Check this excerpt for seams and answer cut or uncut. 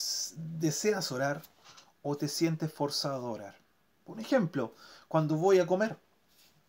uncut